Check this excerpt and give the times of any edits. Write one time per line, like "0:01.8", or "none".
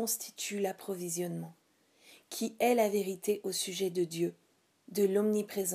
0:04.7